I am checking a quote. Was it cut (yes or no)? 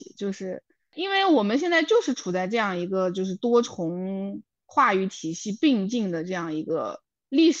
no